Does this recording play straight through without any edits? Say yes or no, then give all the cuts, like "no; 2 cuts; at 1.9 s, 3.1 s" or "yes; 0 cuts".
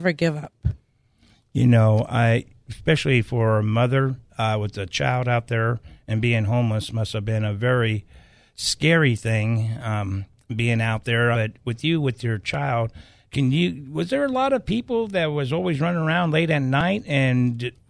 no; 2 cuts; at 11.3 s, 13.2 s